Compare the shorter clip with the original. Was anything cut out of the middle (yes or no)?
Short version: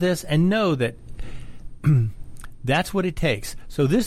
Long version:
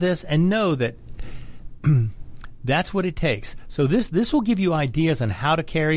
no